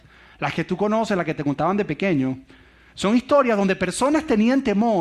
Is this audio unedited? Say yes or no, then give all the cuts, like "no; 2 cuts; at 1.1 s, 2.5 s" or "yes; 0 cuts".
yes; 0 cuts